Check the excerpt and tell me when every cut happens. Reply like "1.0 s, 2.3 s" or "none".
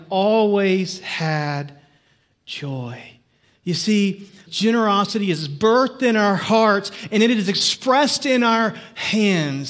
4.5 s